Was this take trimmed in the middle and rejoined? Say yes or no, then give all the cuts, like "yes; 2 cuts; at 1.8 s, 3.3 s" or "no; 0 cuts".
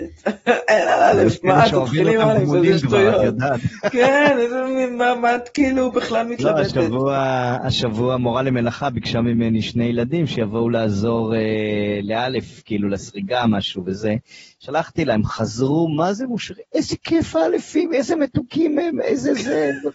no; 0 cuts